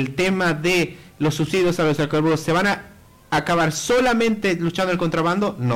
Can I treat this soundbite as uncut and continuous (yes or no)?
yes